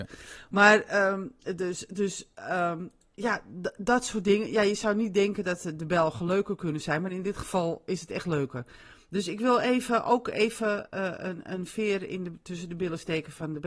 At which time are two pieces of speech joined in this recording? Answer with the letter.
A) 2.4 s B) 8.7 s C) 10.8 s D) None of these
D